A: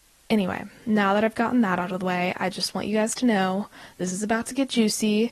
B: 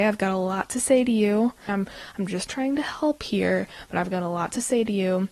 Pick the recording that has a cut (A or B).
B